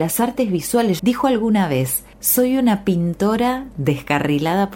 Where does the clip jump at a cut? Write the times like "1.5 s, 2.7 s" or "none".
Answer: 1.0 s, 2.1 s